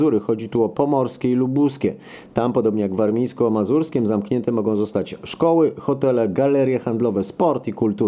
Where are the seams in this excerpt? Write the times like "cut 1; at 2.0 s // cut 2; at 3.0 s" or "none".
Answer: none